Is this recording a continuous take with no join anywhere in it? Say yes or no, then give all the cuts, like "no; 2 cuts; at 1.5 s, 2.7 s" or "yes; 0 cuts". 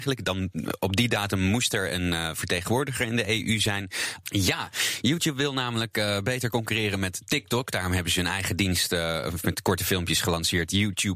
no; 1 cut; at 4.2 s